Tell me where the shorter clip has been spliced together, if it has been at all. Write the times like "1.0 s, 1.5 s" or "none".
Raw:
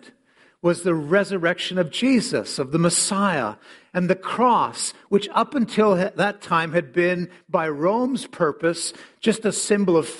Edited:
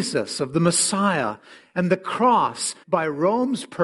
2.8 s

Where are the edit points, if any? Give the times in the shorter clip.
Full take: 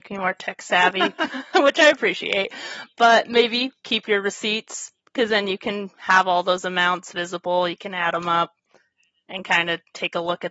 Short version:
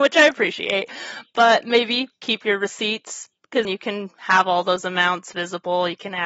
3.6 s

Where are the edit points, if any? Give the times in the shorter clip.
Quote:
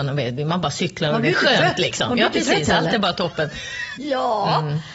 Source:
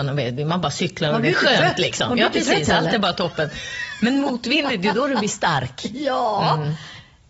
4.0 s

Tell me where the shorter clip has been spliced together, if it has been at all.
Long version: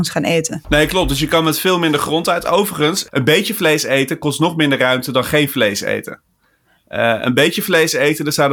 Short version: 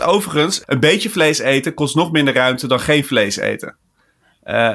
none

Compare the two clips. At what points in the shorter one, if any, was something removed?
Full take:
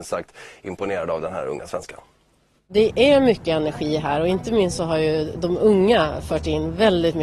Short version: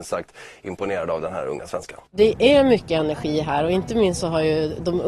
2.1 s

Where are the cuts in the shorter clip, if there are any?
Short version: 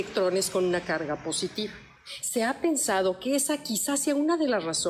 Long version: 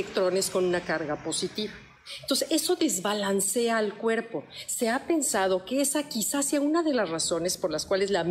2.2 s

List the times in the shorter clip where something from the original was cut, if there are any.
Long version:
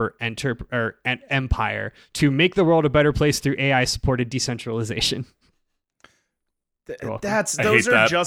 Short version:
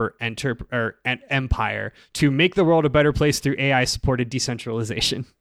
none

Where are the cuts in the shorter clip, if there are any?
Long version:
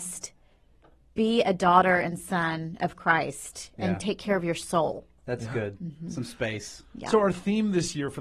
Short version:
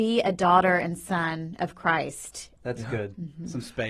2.6 s

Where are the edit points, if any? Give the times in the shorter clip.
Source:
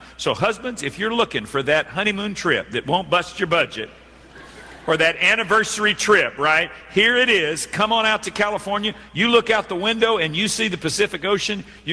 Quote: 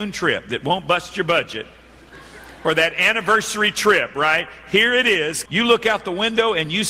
5.5 s

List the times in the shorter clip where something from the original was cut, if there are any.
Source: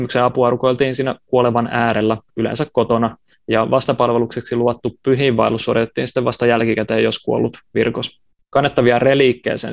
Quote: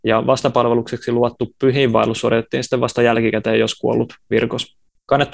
none

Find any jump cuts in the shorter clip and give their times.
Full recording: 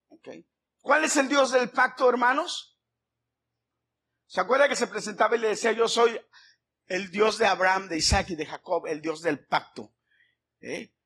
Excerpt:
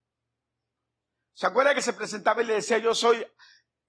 none

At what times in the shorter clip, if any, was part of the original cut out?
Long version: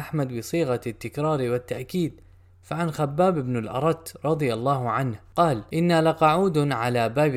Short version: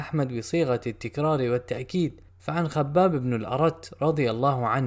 2.3 s

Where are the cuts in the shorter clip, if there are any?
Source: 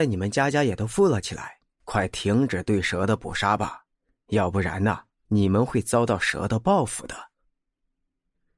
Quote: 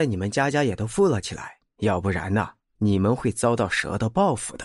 1.7 s

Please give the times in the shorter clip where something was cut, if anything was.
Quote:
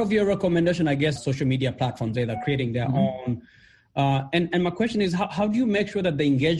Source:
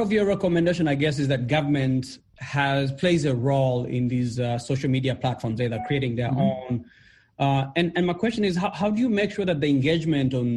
1.2 s

